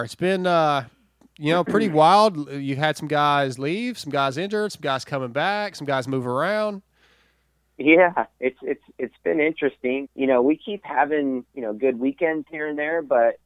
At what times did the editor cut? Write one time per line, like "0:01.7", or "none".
0:10.1
0:11.5